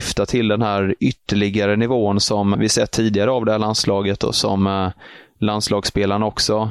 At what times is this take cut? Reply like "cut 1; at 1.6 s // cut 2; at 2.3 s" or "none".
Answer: cut 1; at 2.5 s